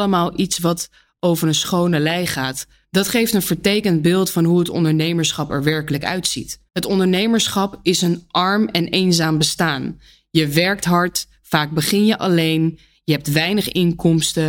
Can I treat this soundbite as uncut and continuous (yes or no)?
no